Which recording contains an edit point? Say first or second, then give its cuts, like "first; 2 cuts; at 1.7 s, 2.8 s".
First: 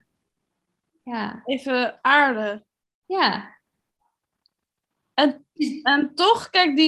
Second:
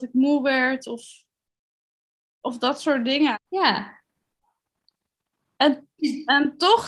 second; 1 cut; at 3.3 s